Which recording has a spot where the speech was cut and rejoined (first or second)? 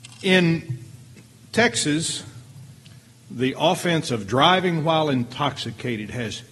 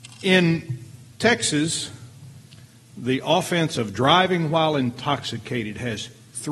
second